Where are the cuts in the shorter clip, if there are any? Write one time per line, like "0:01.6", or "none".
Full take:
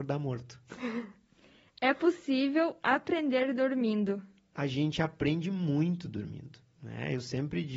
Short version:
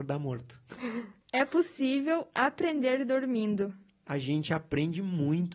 0:01.2